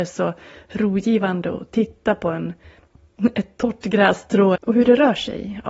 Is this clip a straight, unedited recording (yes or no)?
no